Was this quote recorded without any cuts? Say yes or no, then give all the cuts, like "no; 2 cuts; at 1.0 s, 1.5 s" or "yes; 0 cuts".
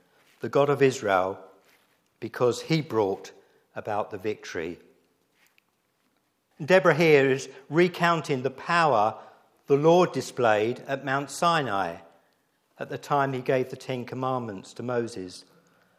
no; 1 cut; at 6.5 s